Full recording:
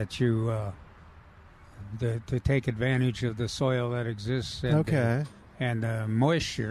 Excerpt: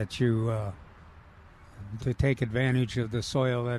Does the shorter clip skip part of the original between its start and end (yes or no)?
yes